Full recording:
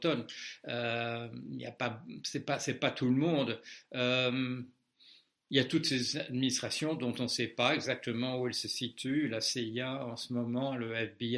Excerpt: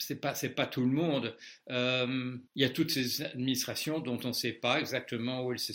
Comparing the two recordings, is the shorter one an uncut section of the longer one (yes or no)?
no